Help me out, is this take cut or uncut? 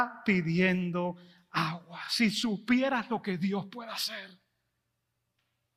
uncut